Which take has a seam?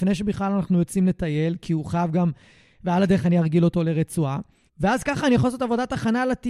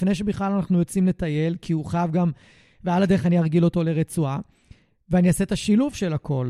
first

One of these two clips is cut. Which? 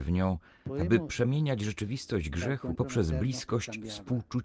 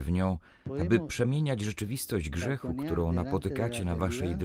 first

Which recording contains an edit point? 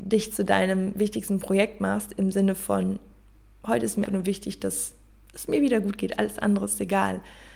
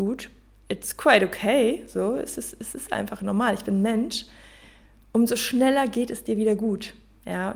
first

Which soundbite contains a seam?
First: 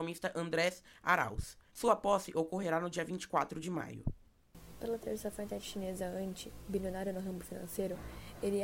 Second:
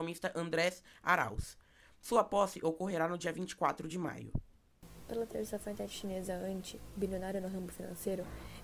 first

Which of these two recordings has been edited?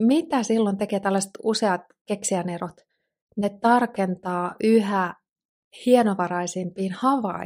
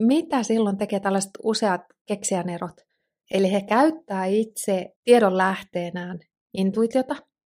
second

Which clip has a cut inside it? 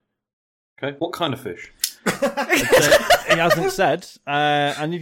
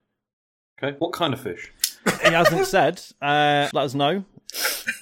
second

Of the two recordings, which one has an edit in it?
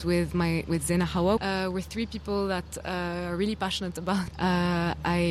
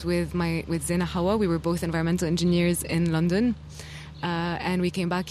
first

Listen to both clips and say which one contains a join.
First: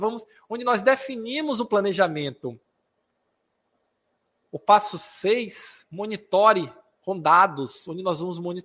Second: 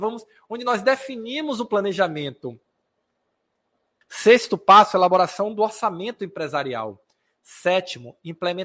second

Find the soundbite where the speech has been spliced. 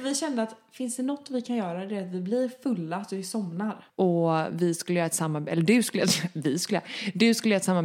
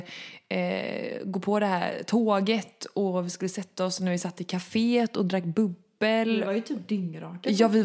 first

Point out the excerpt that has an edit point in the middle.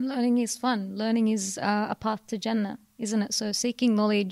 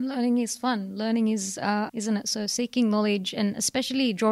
second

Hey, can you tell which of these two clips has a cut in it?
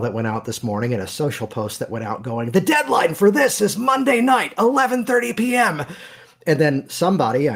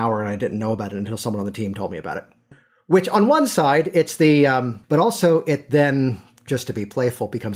second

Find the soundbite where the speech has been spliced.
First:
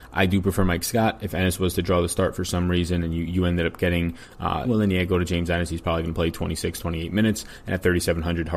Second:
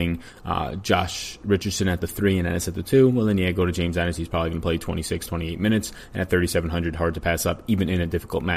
first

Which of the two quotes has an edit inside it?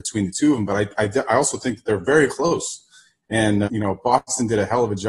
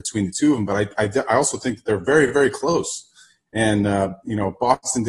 first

